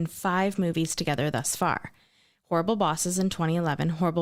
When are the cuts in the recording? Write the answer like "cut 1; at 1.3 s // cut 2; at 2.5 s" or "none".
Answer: none

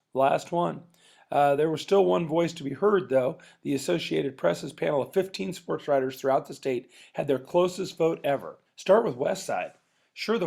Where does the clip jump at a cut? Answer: cut 1; at 8.6 s

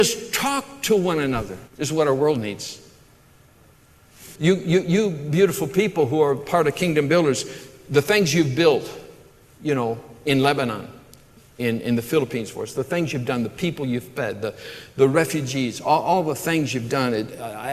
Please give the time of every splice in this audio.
cut 1; at 1.7 s // cut 2; at 4.4 s

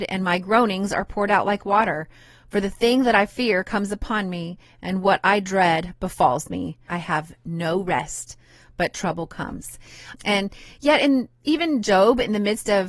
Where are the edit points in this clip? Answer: cut 1; at 6.9 s // cut 2; at 10.1 s

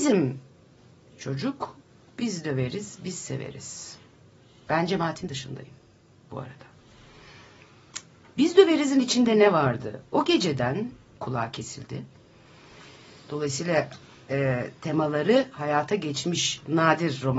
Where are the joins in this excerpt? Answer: cut 1; at 11.1 s

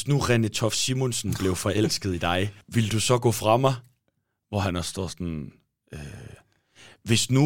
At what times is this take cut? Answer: cut 1; at 2.6 s

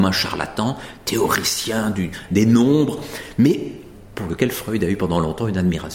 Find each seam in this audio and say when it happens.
cut 1; at 2.3 s

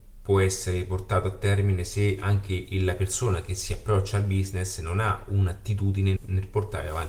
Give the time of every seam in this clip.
cut 1; at 6.2 s

